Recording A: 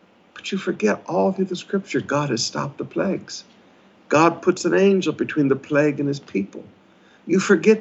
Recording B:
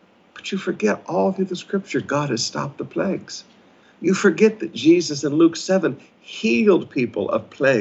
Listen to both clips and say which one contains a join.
B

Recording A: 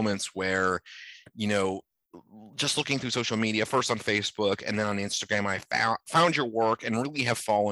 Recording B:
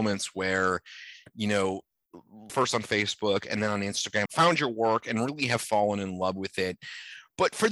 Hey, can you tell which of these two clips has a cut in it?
B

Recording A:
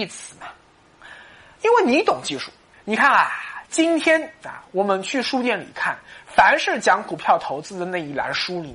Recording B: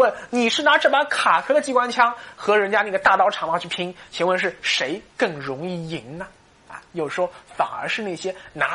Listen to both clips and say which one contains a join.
A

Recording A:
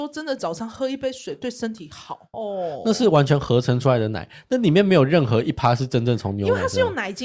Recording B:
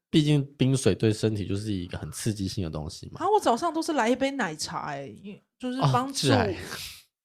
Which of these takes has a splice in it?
A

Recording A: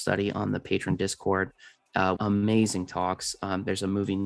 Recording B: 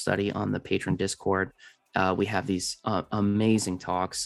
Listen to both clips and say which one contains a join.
A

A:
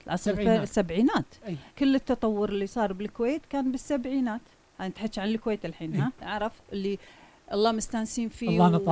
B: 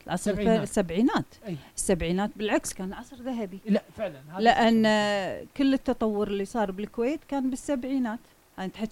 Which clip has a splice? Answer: A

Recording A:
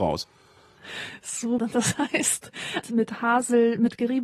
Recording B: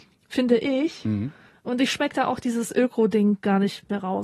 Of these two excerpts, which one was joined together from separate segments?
A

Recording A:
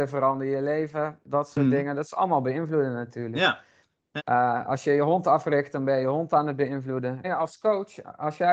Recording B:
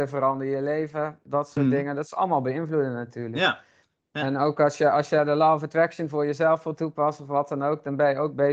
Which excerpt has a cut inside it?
A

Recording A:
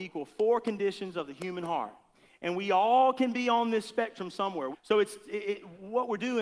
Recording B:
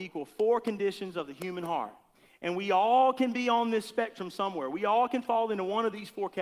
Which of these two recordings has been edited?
A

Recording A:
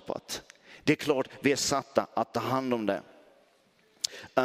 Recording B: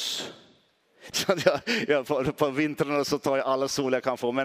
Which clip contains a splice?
B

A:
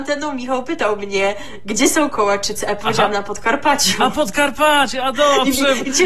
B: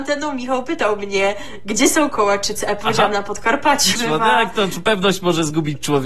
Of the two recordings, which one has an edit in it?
B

